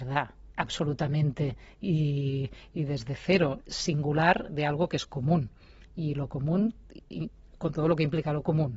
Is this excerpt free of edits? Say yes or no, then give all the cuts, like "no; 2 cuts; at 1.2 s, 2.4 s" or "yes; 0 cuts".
no; 1 cut; at 3.6 s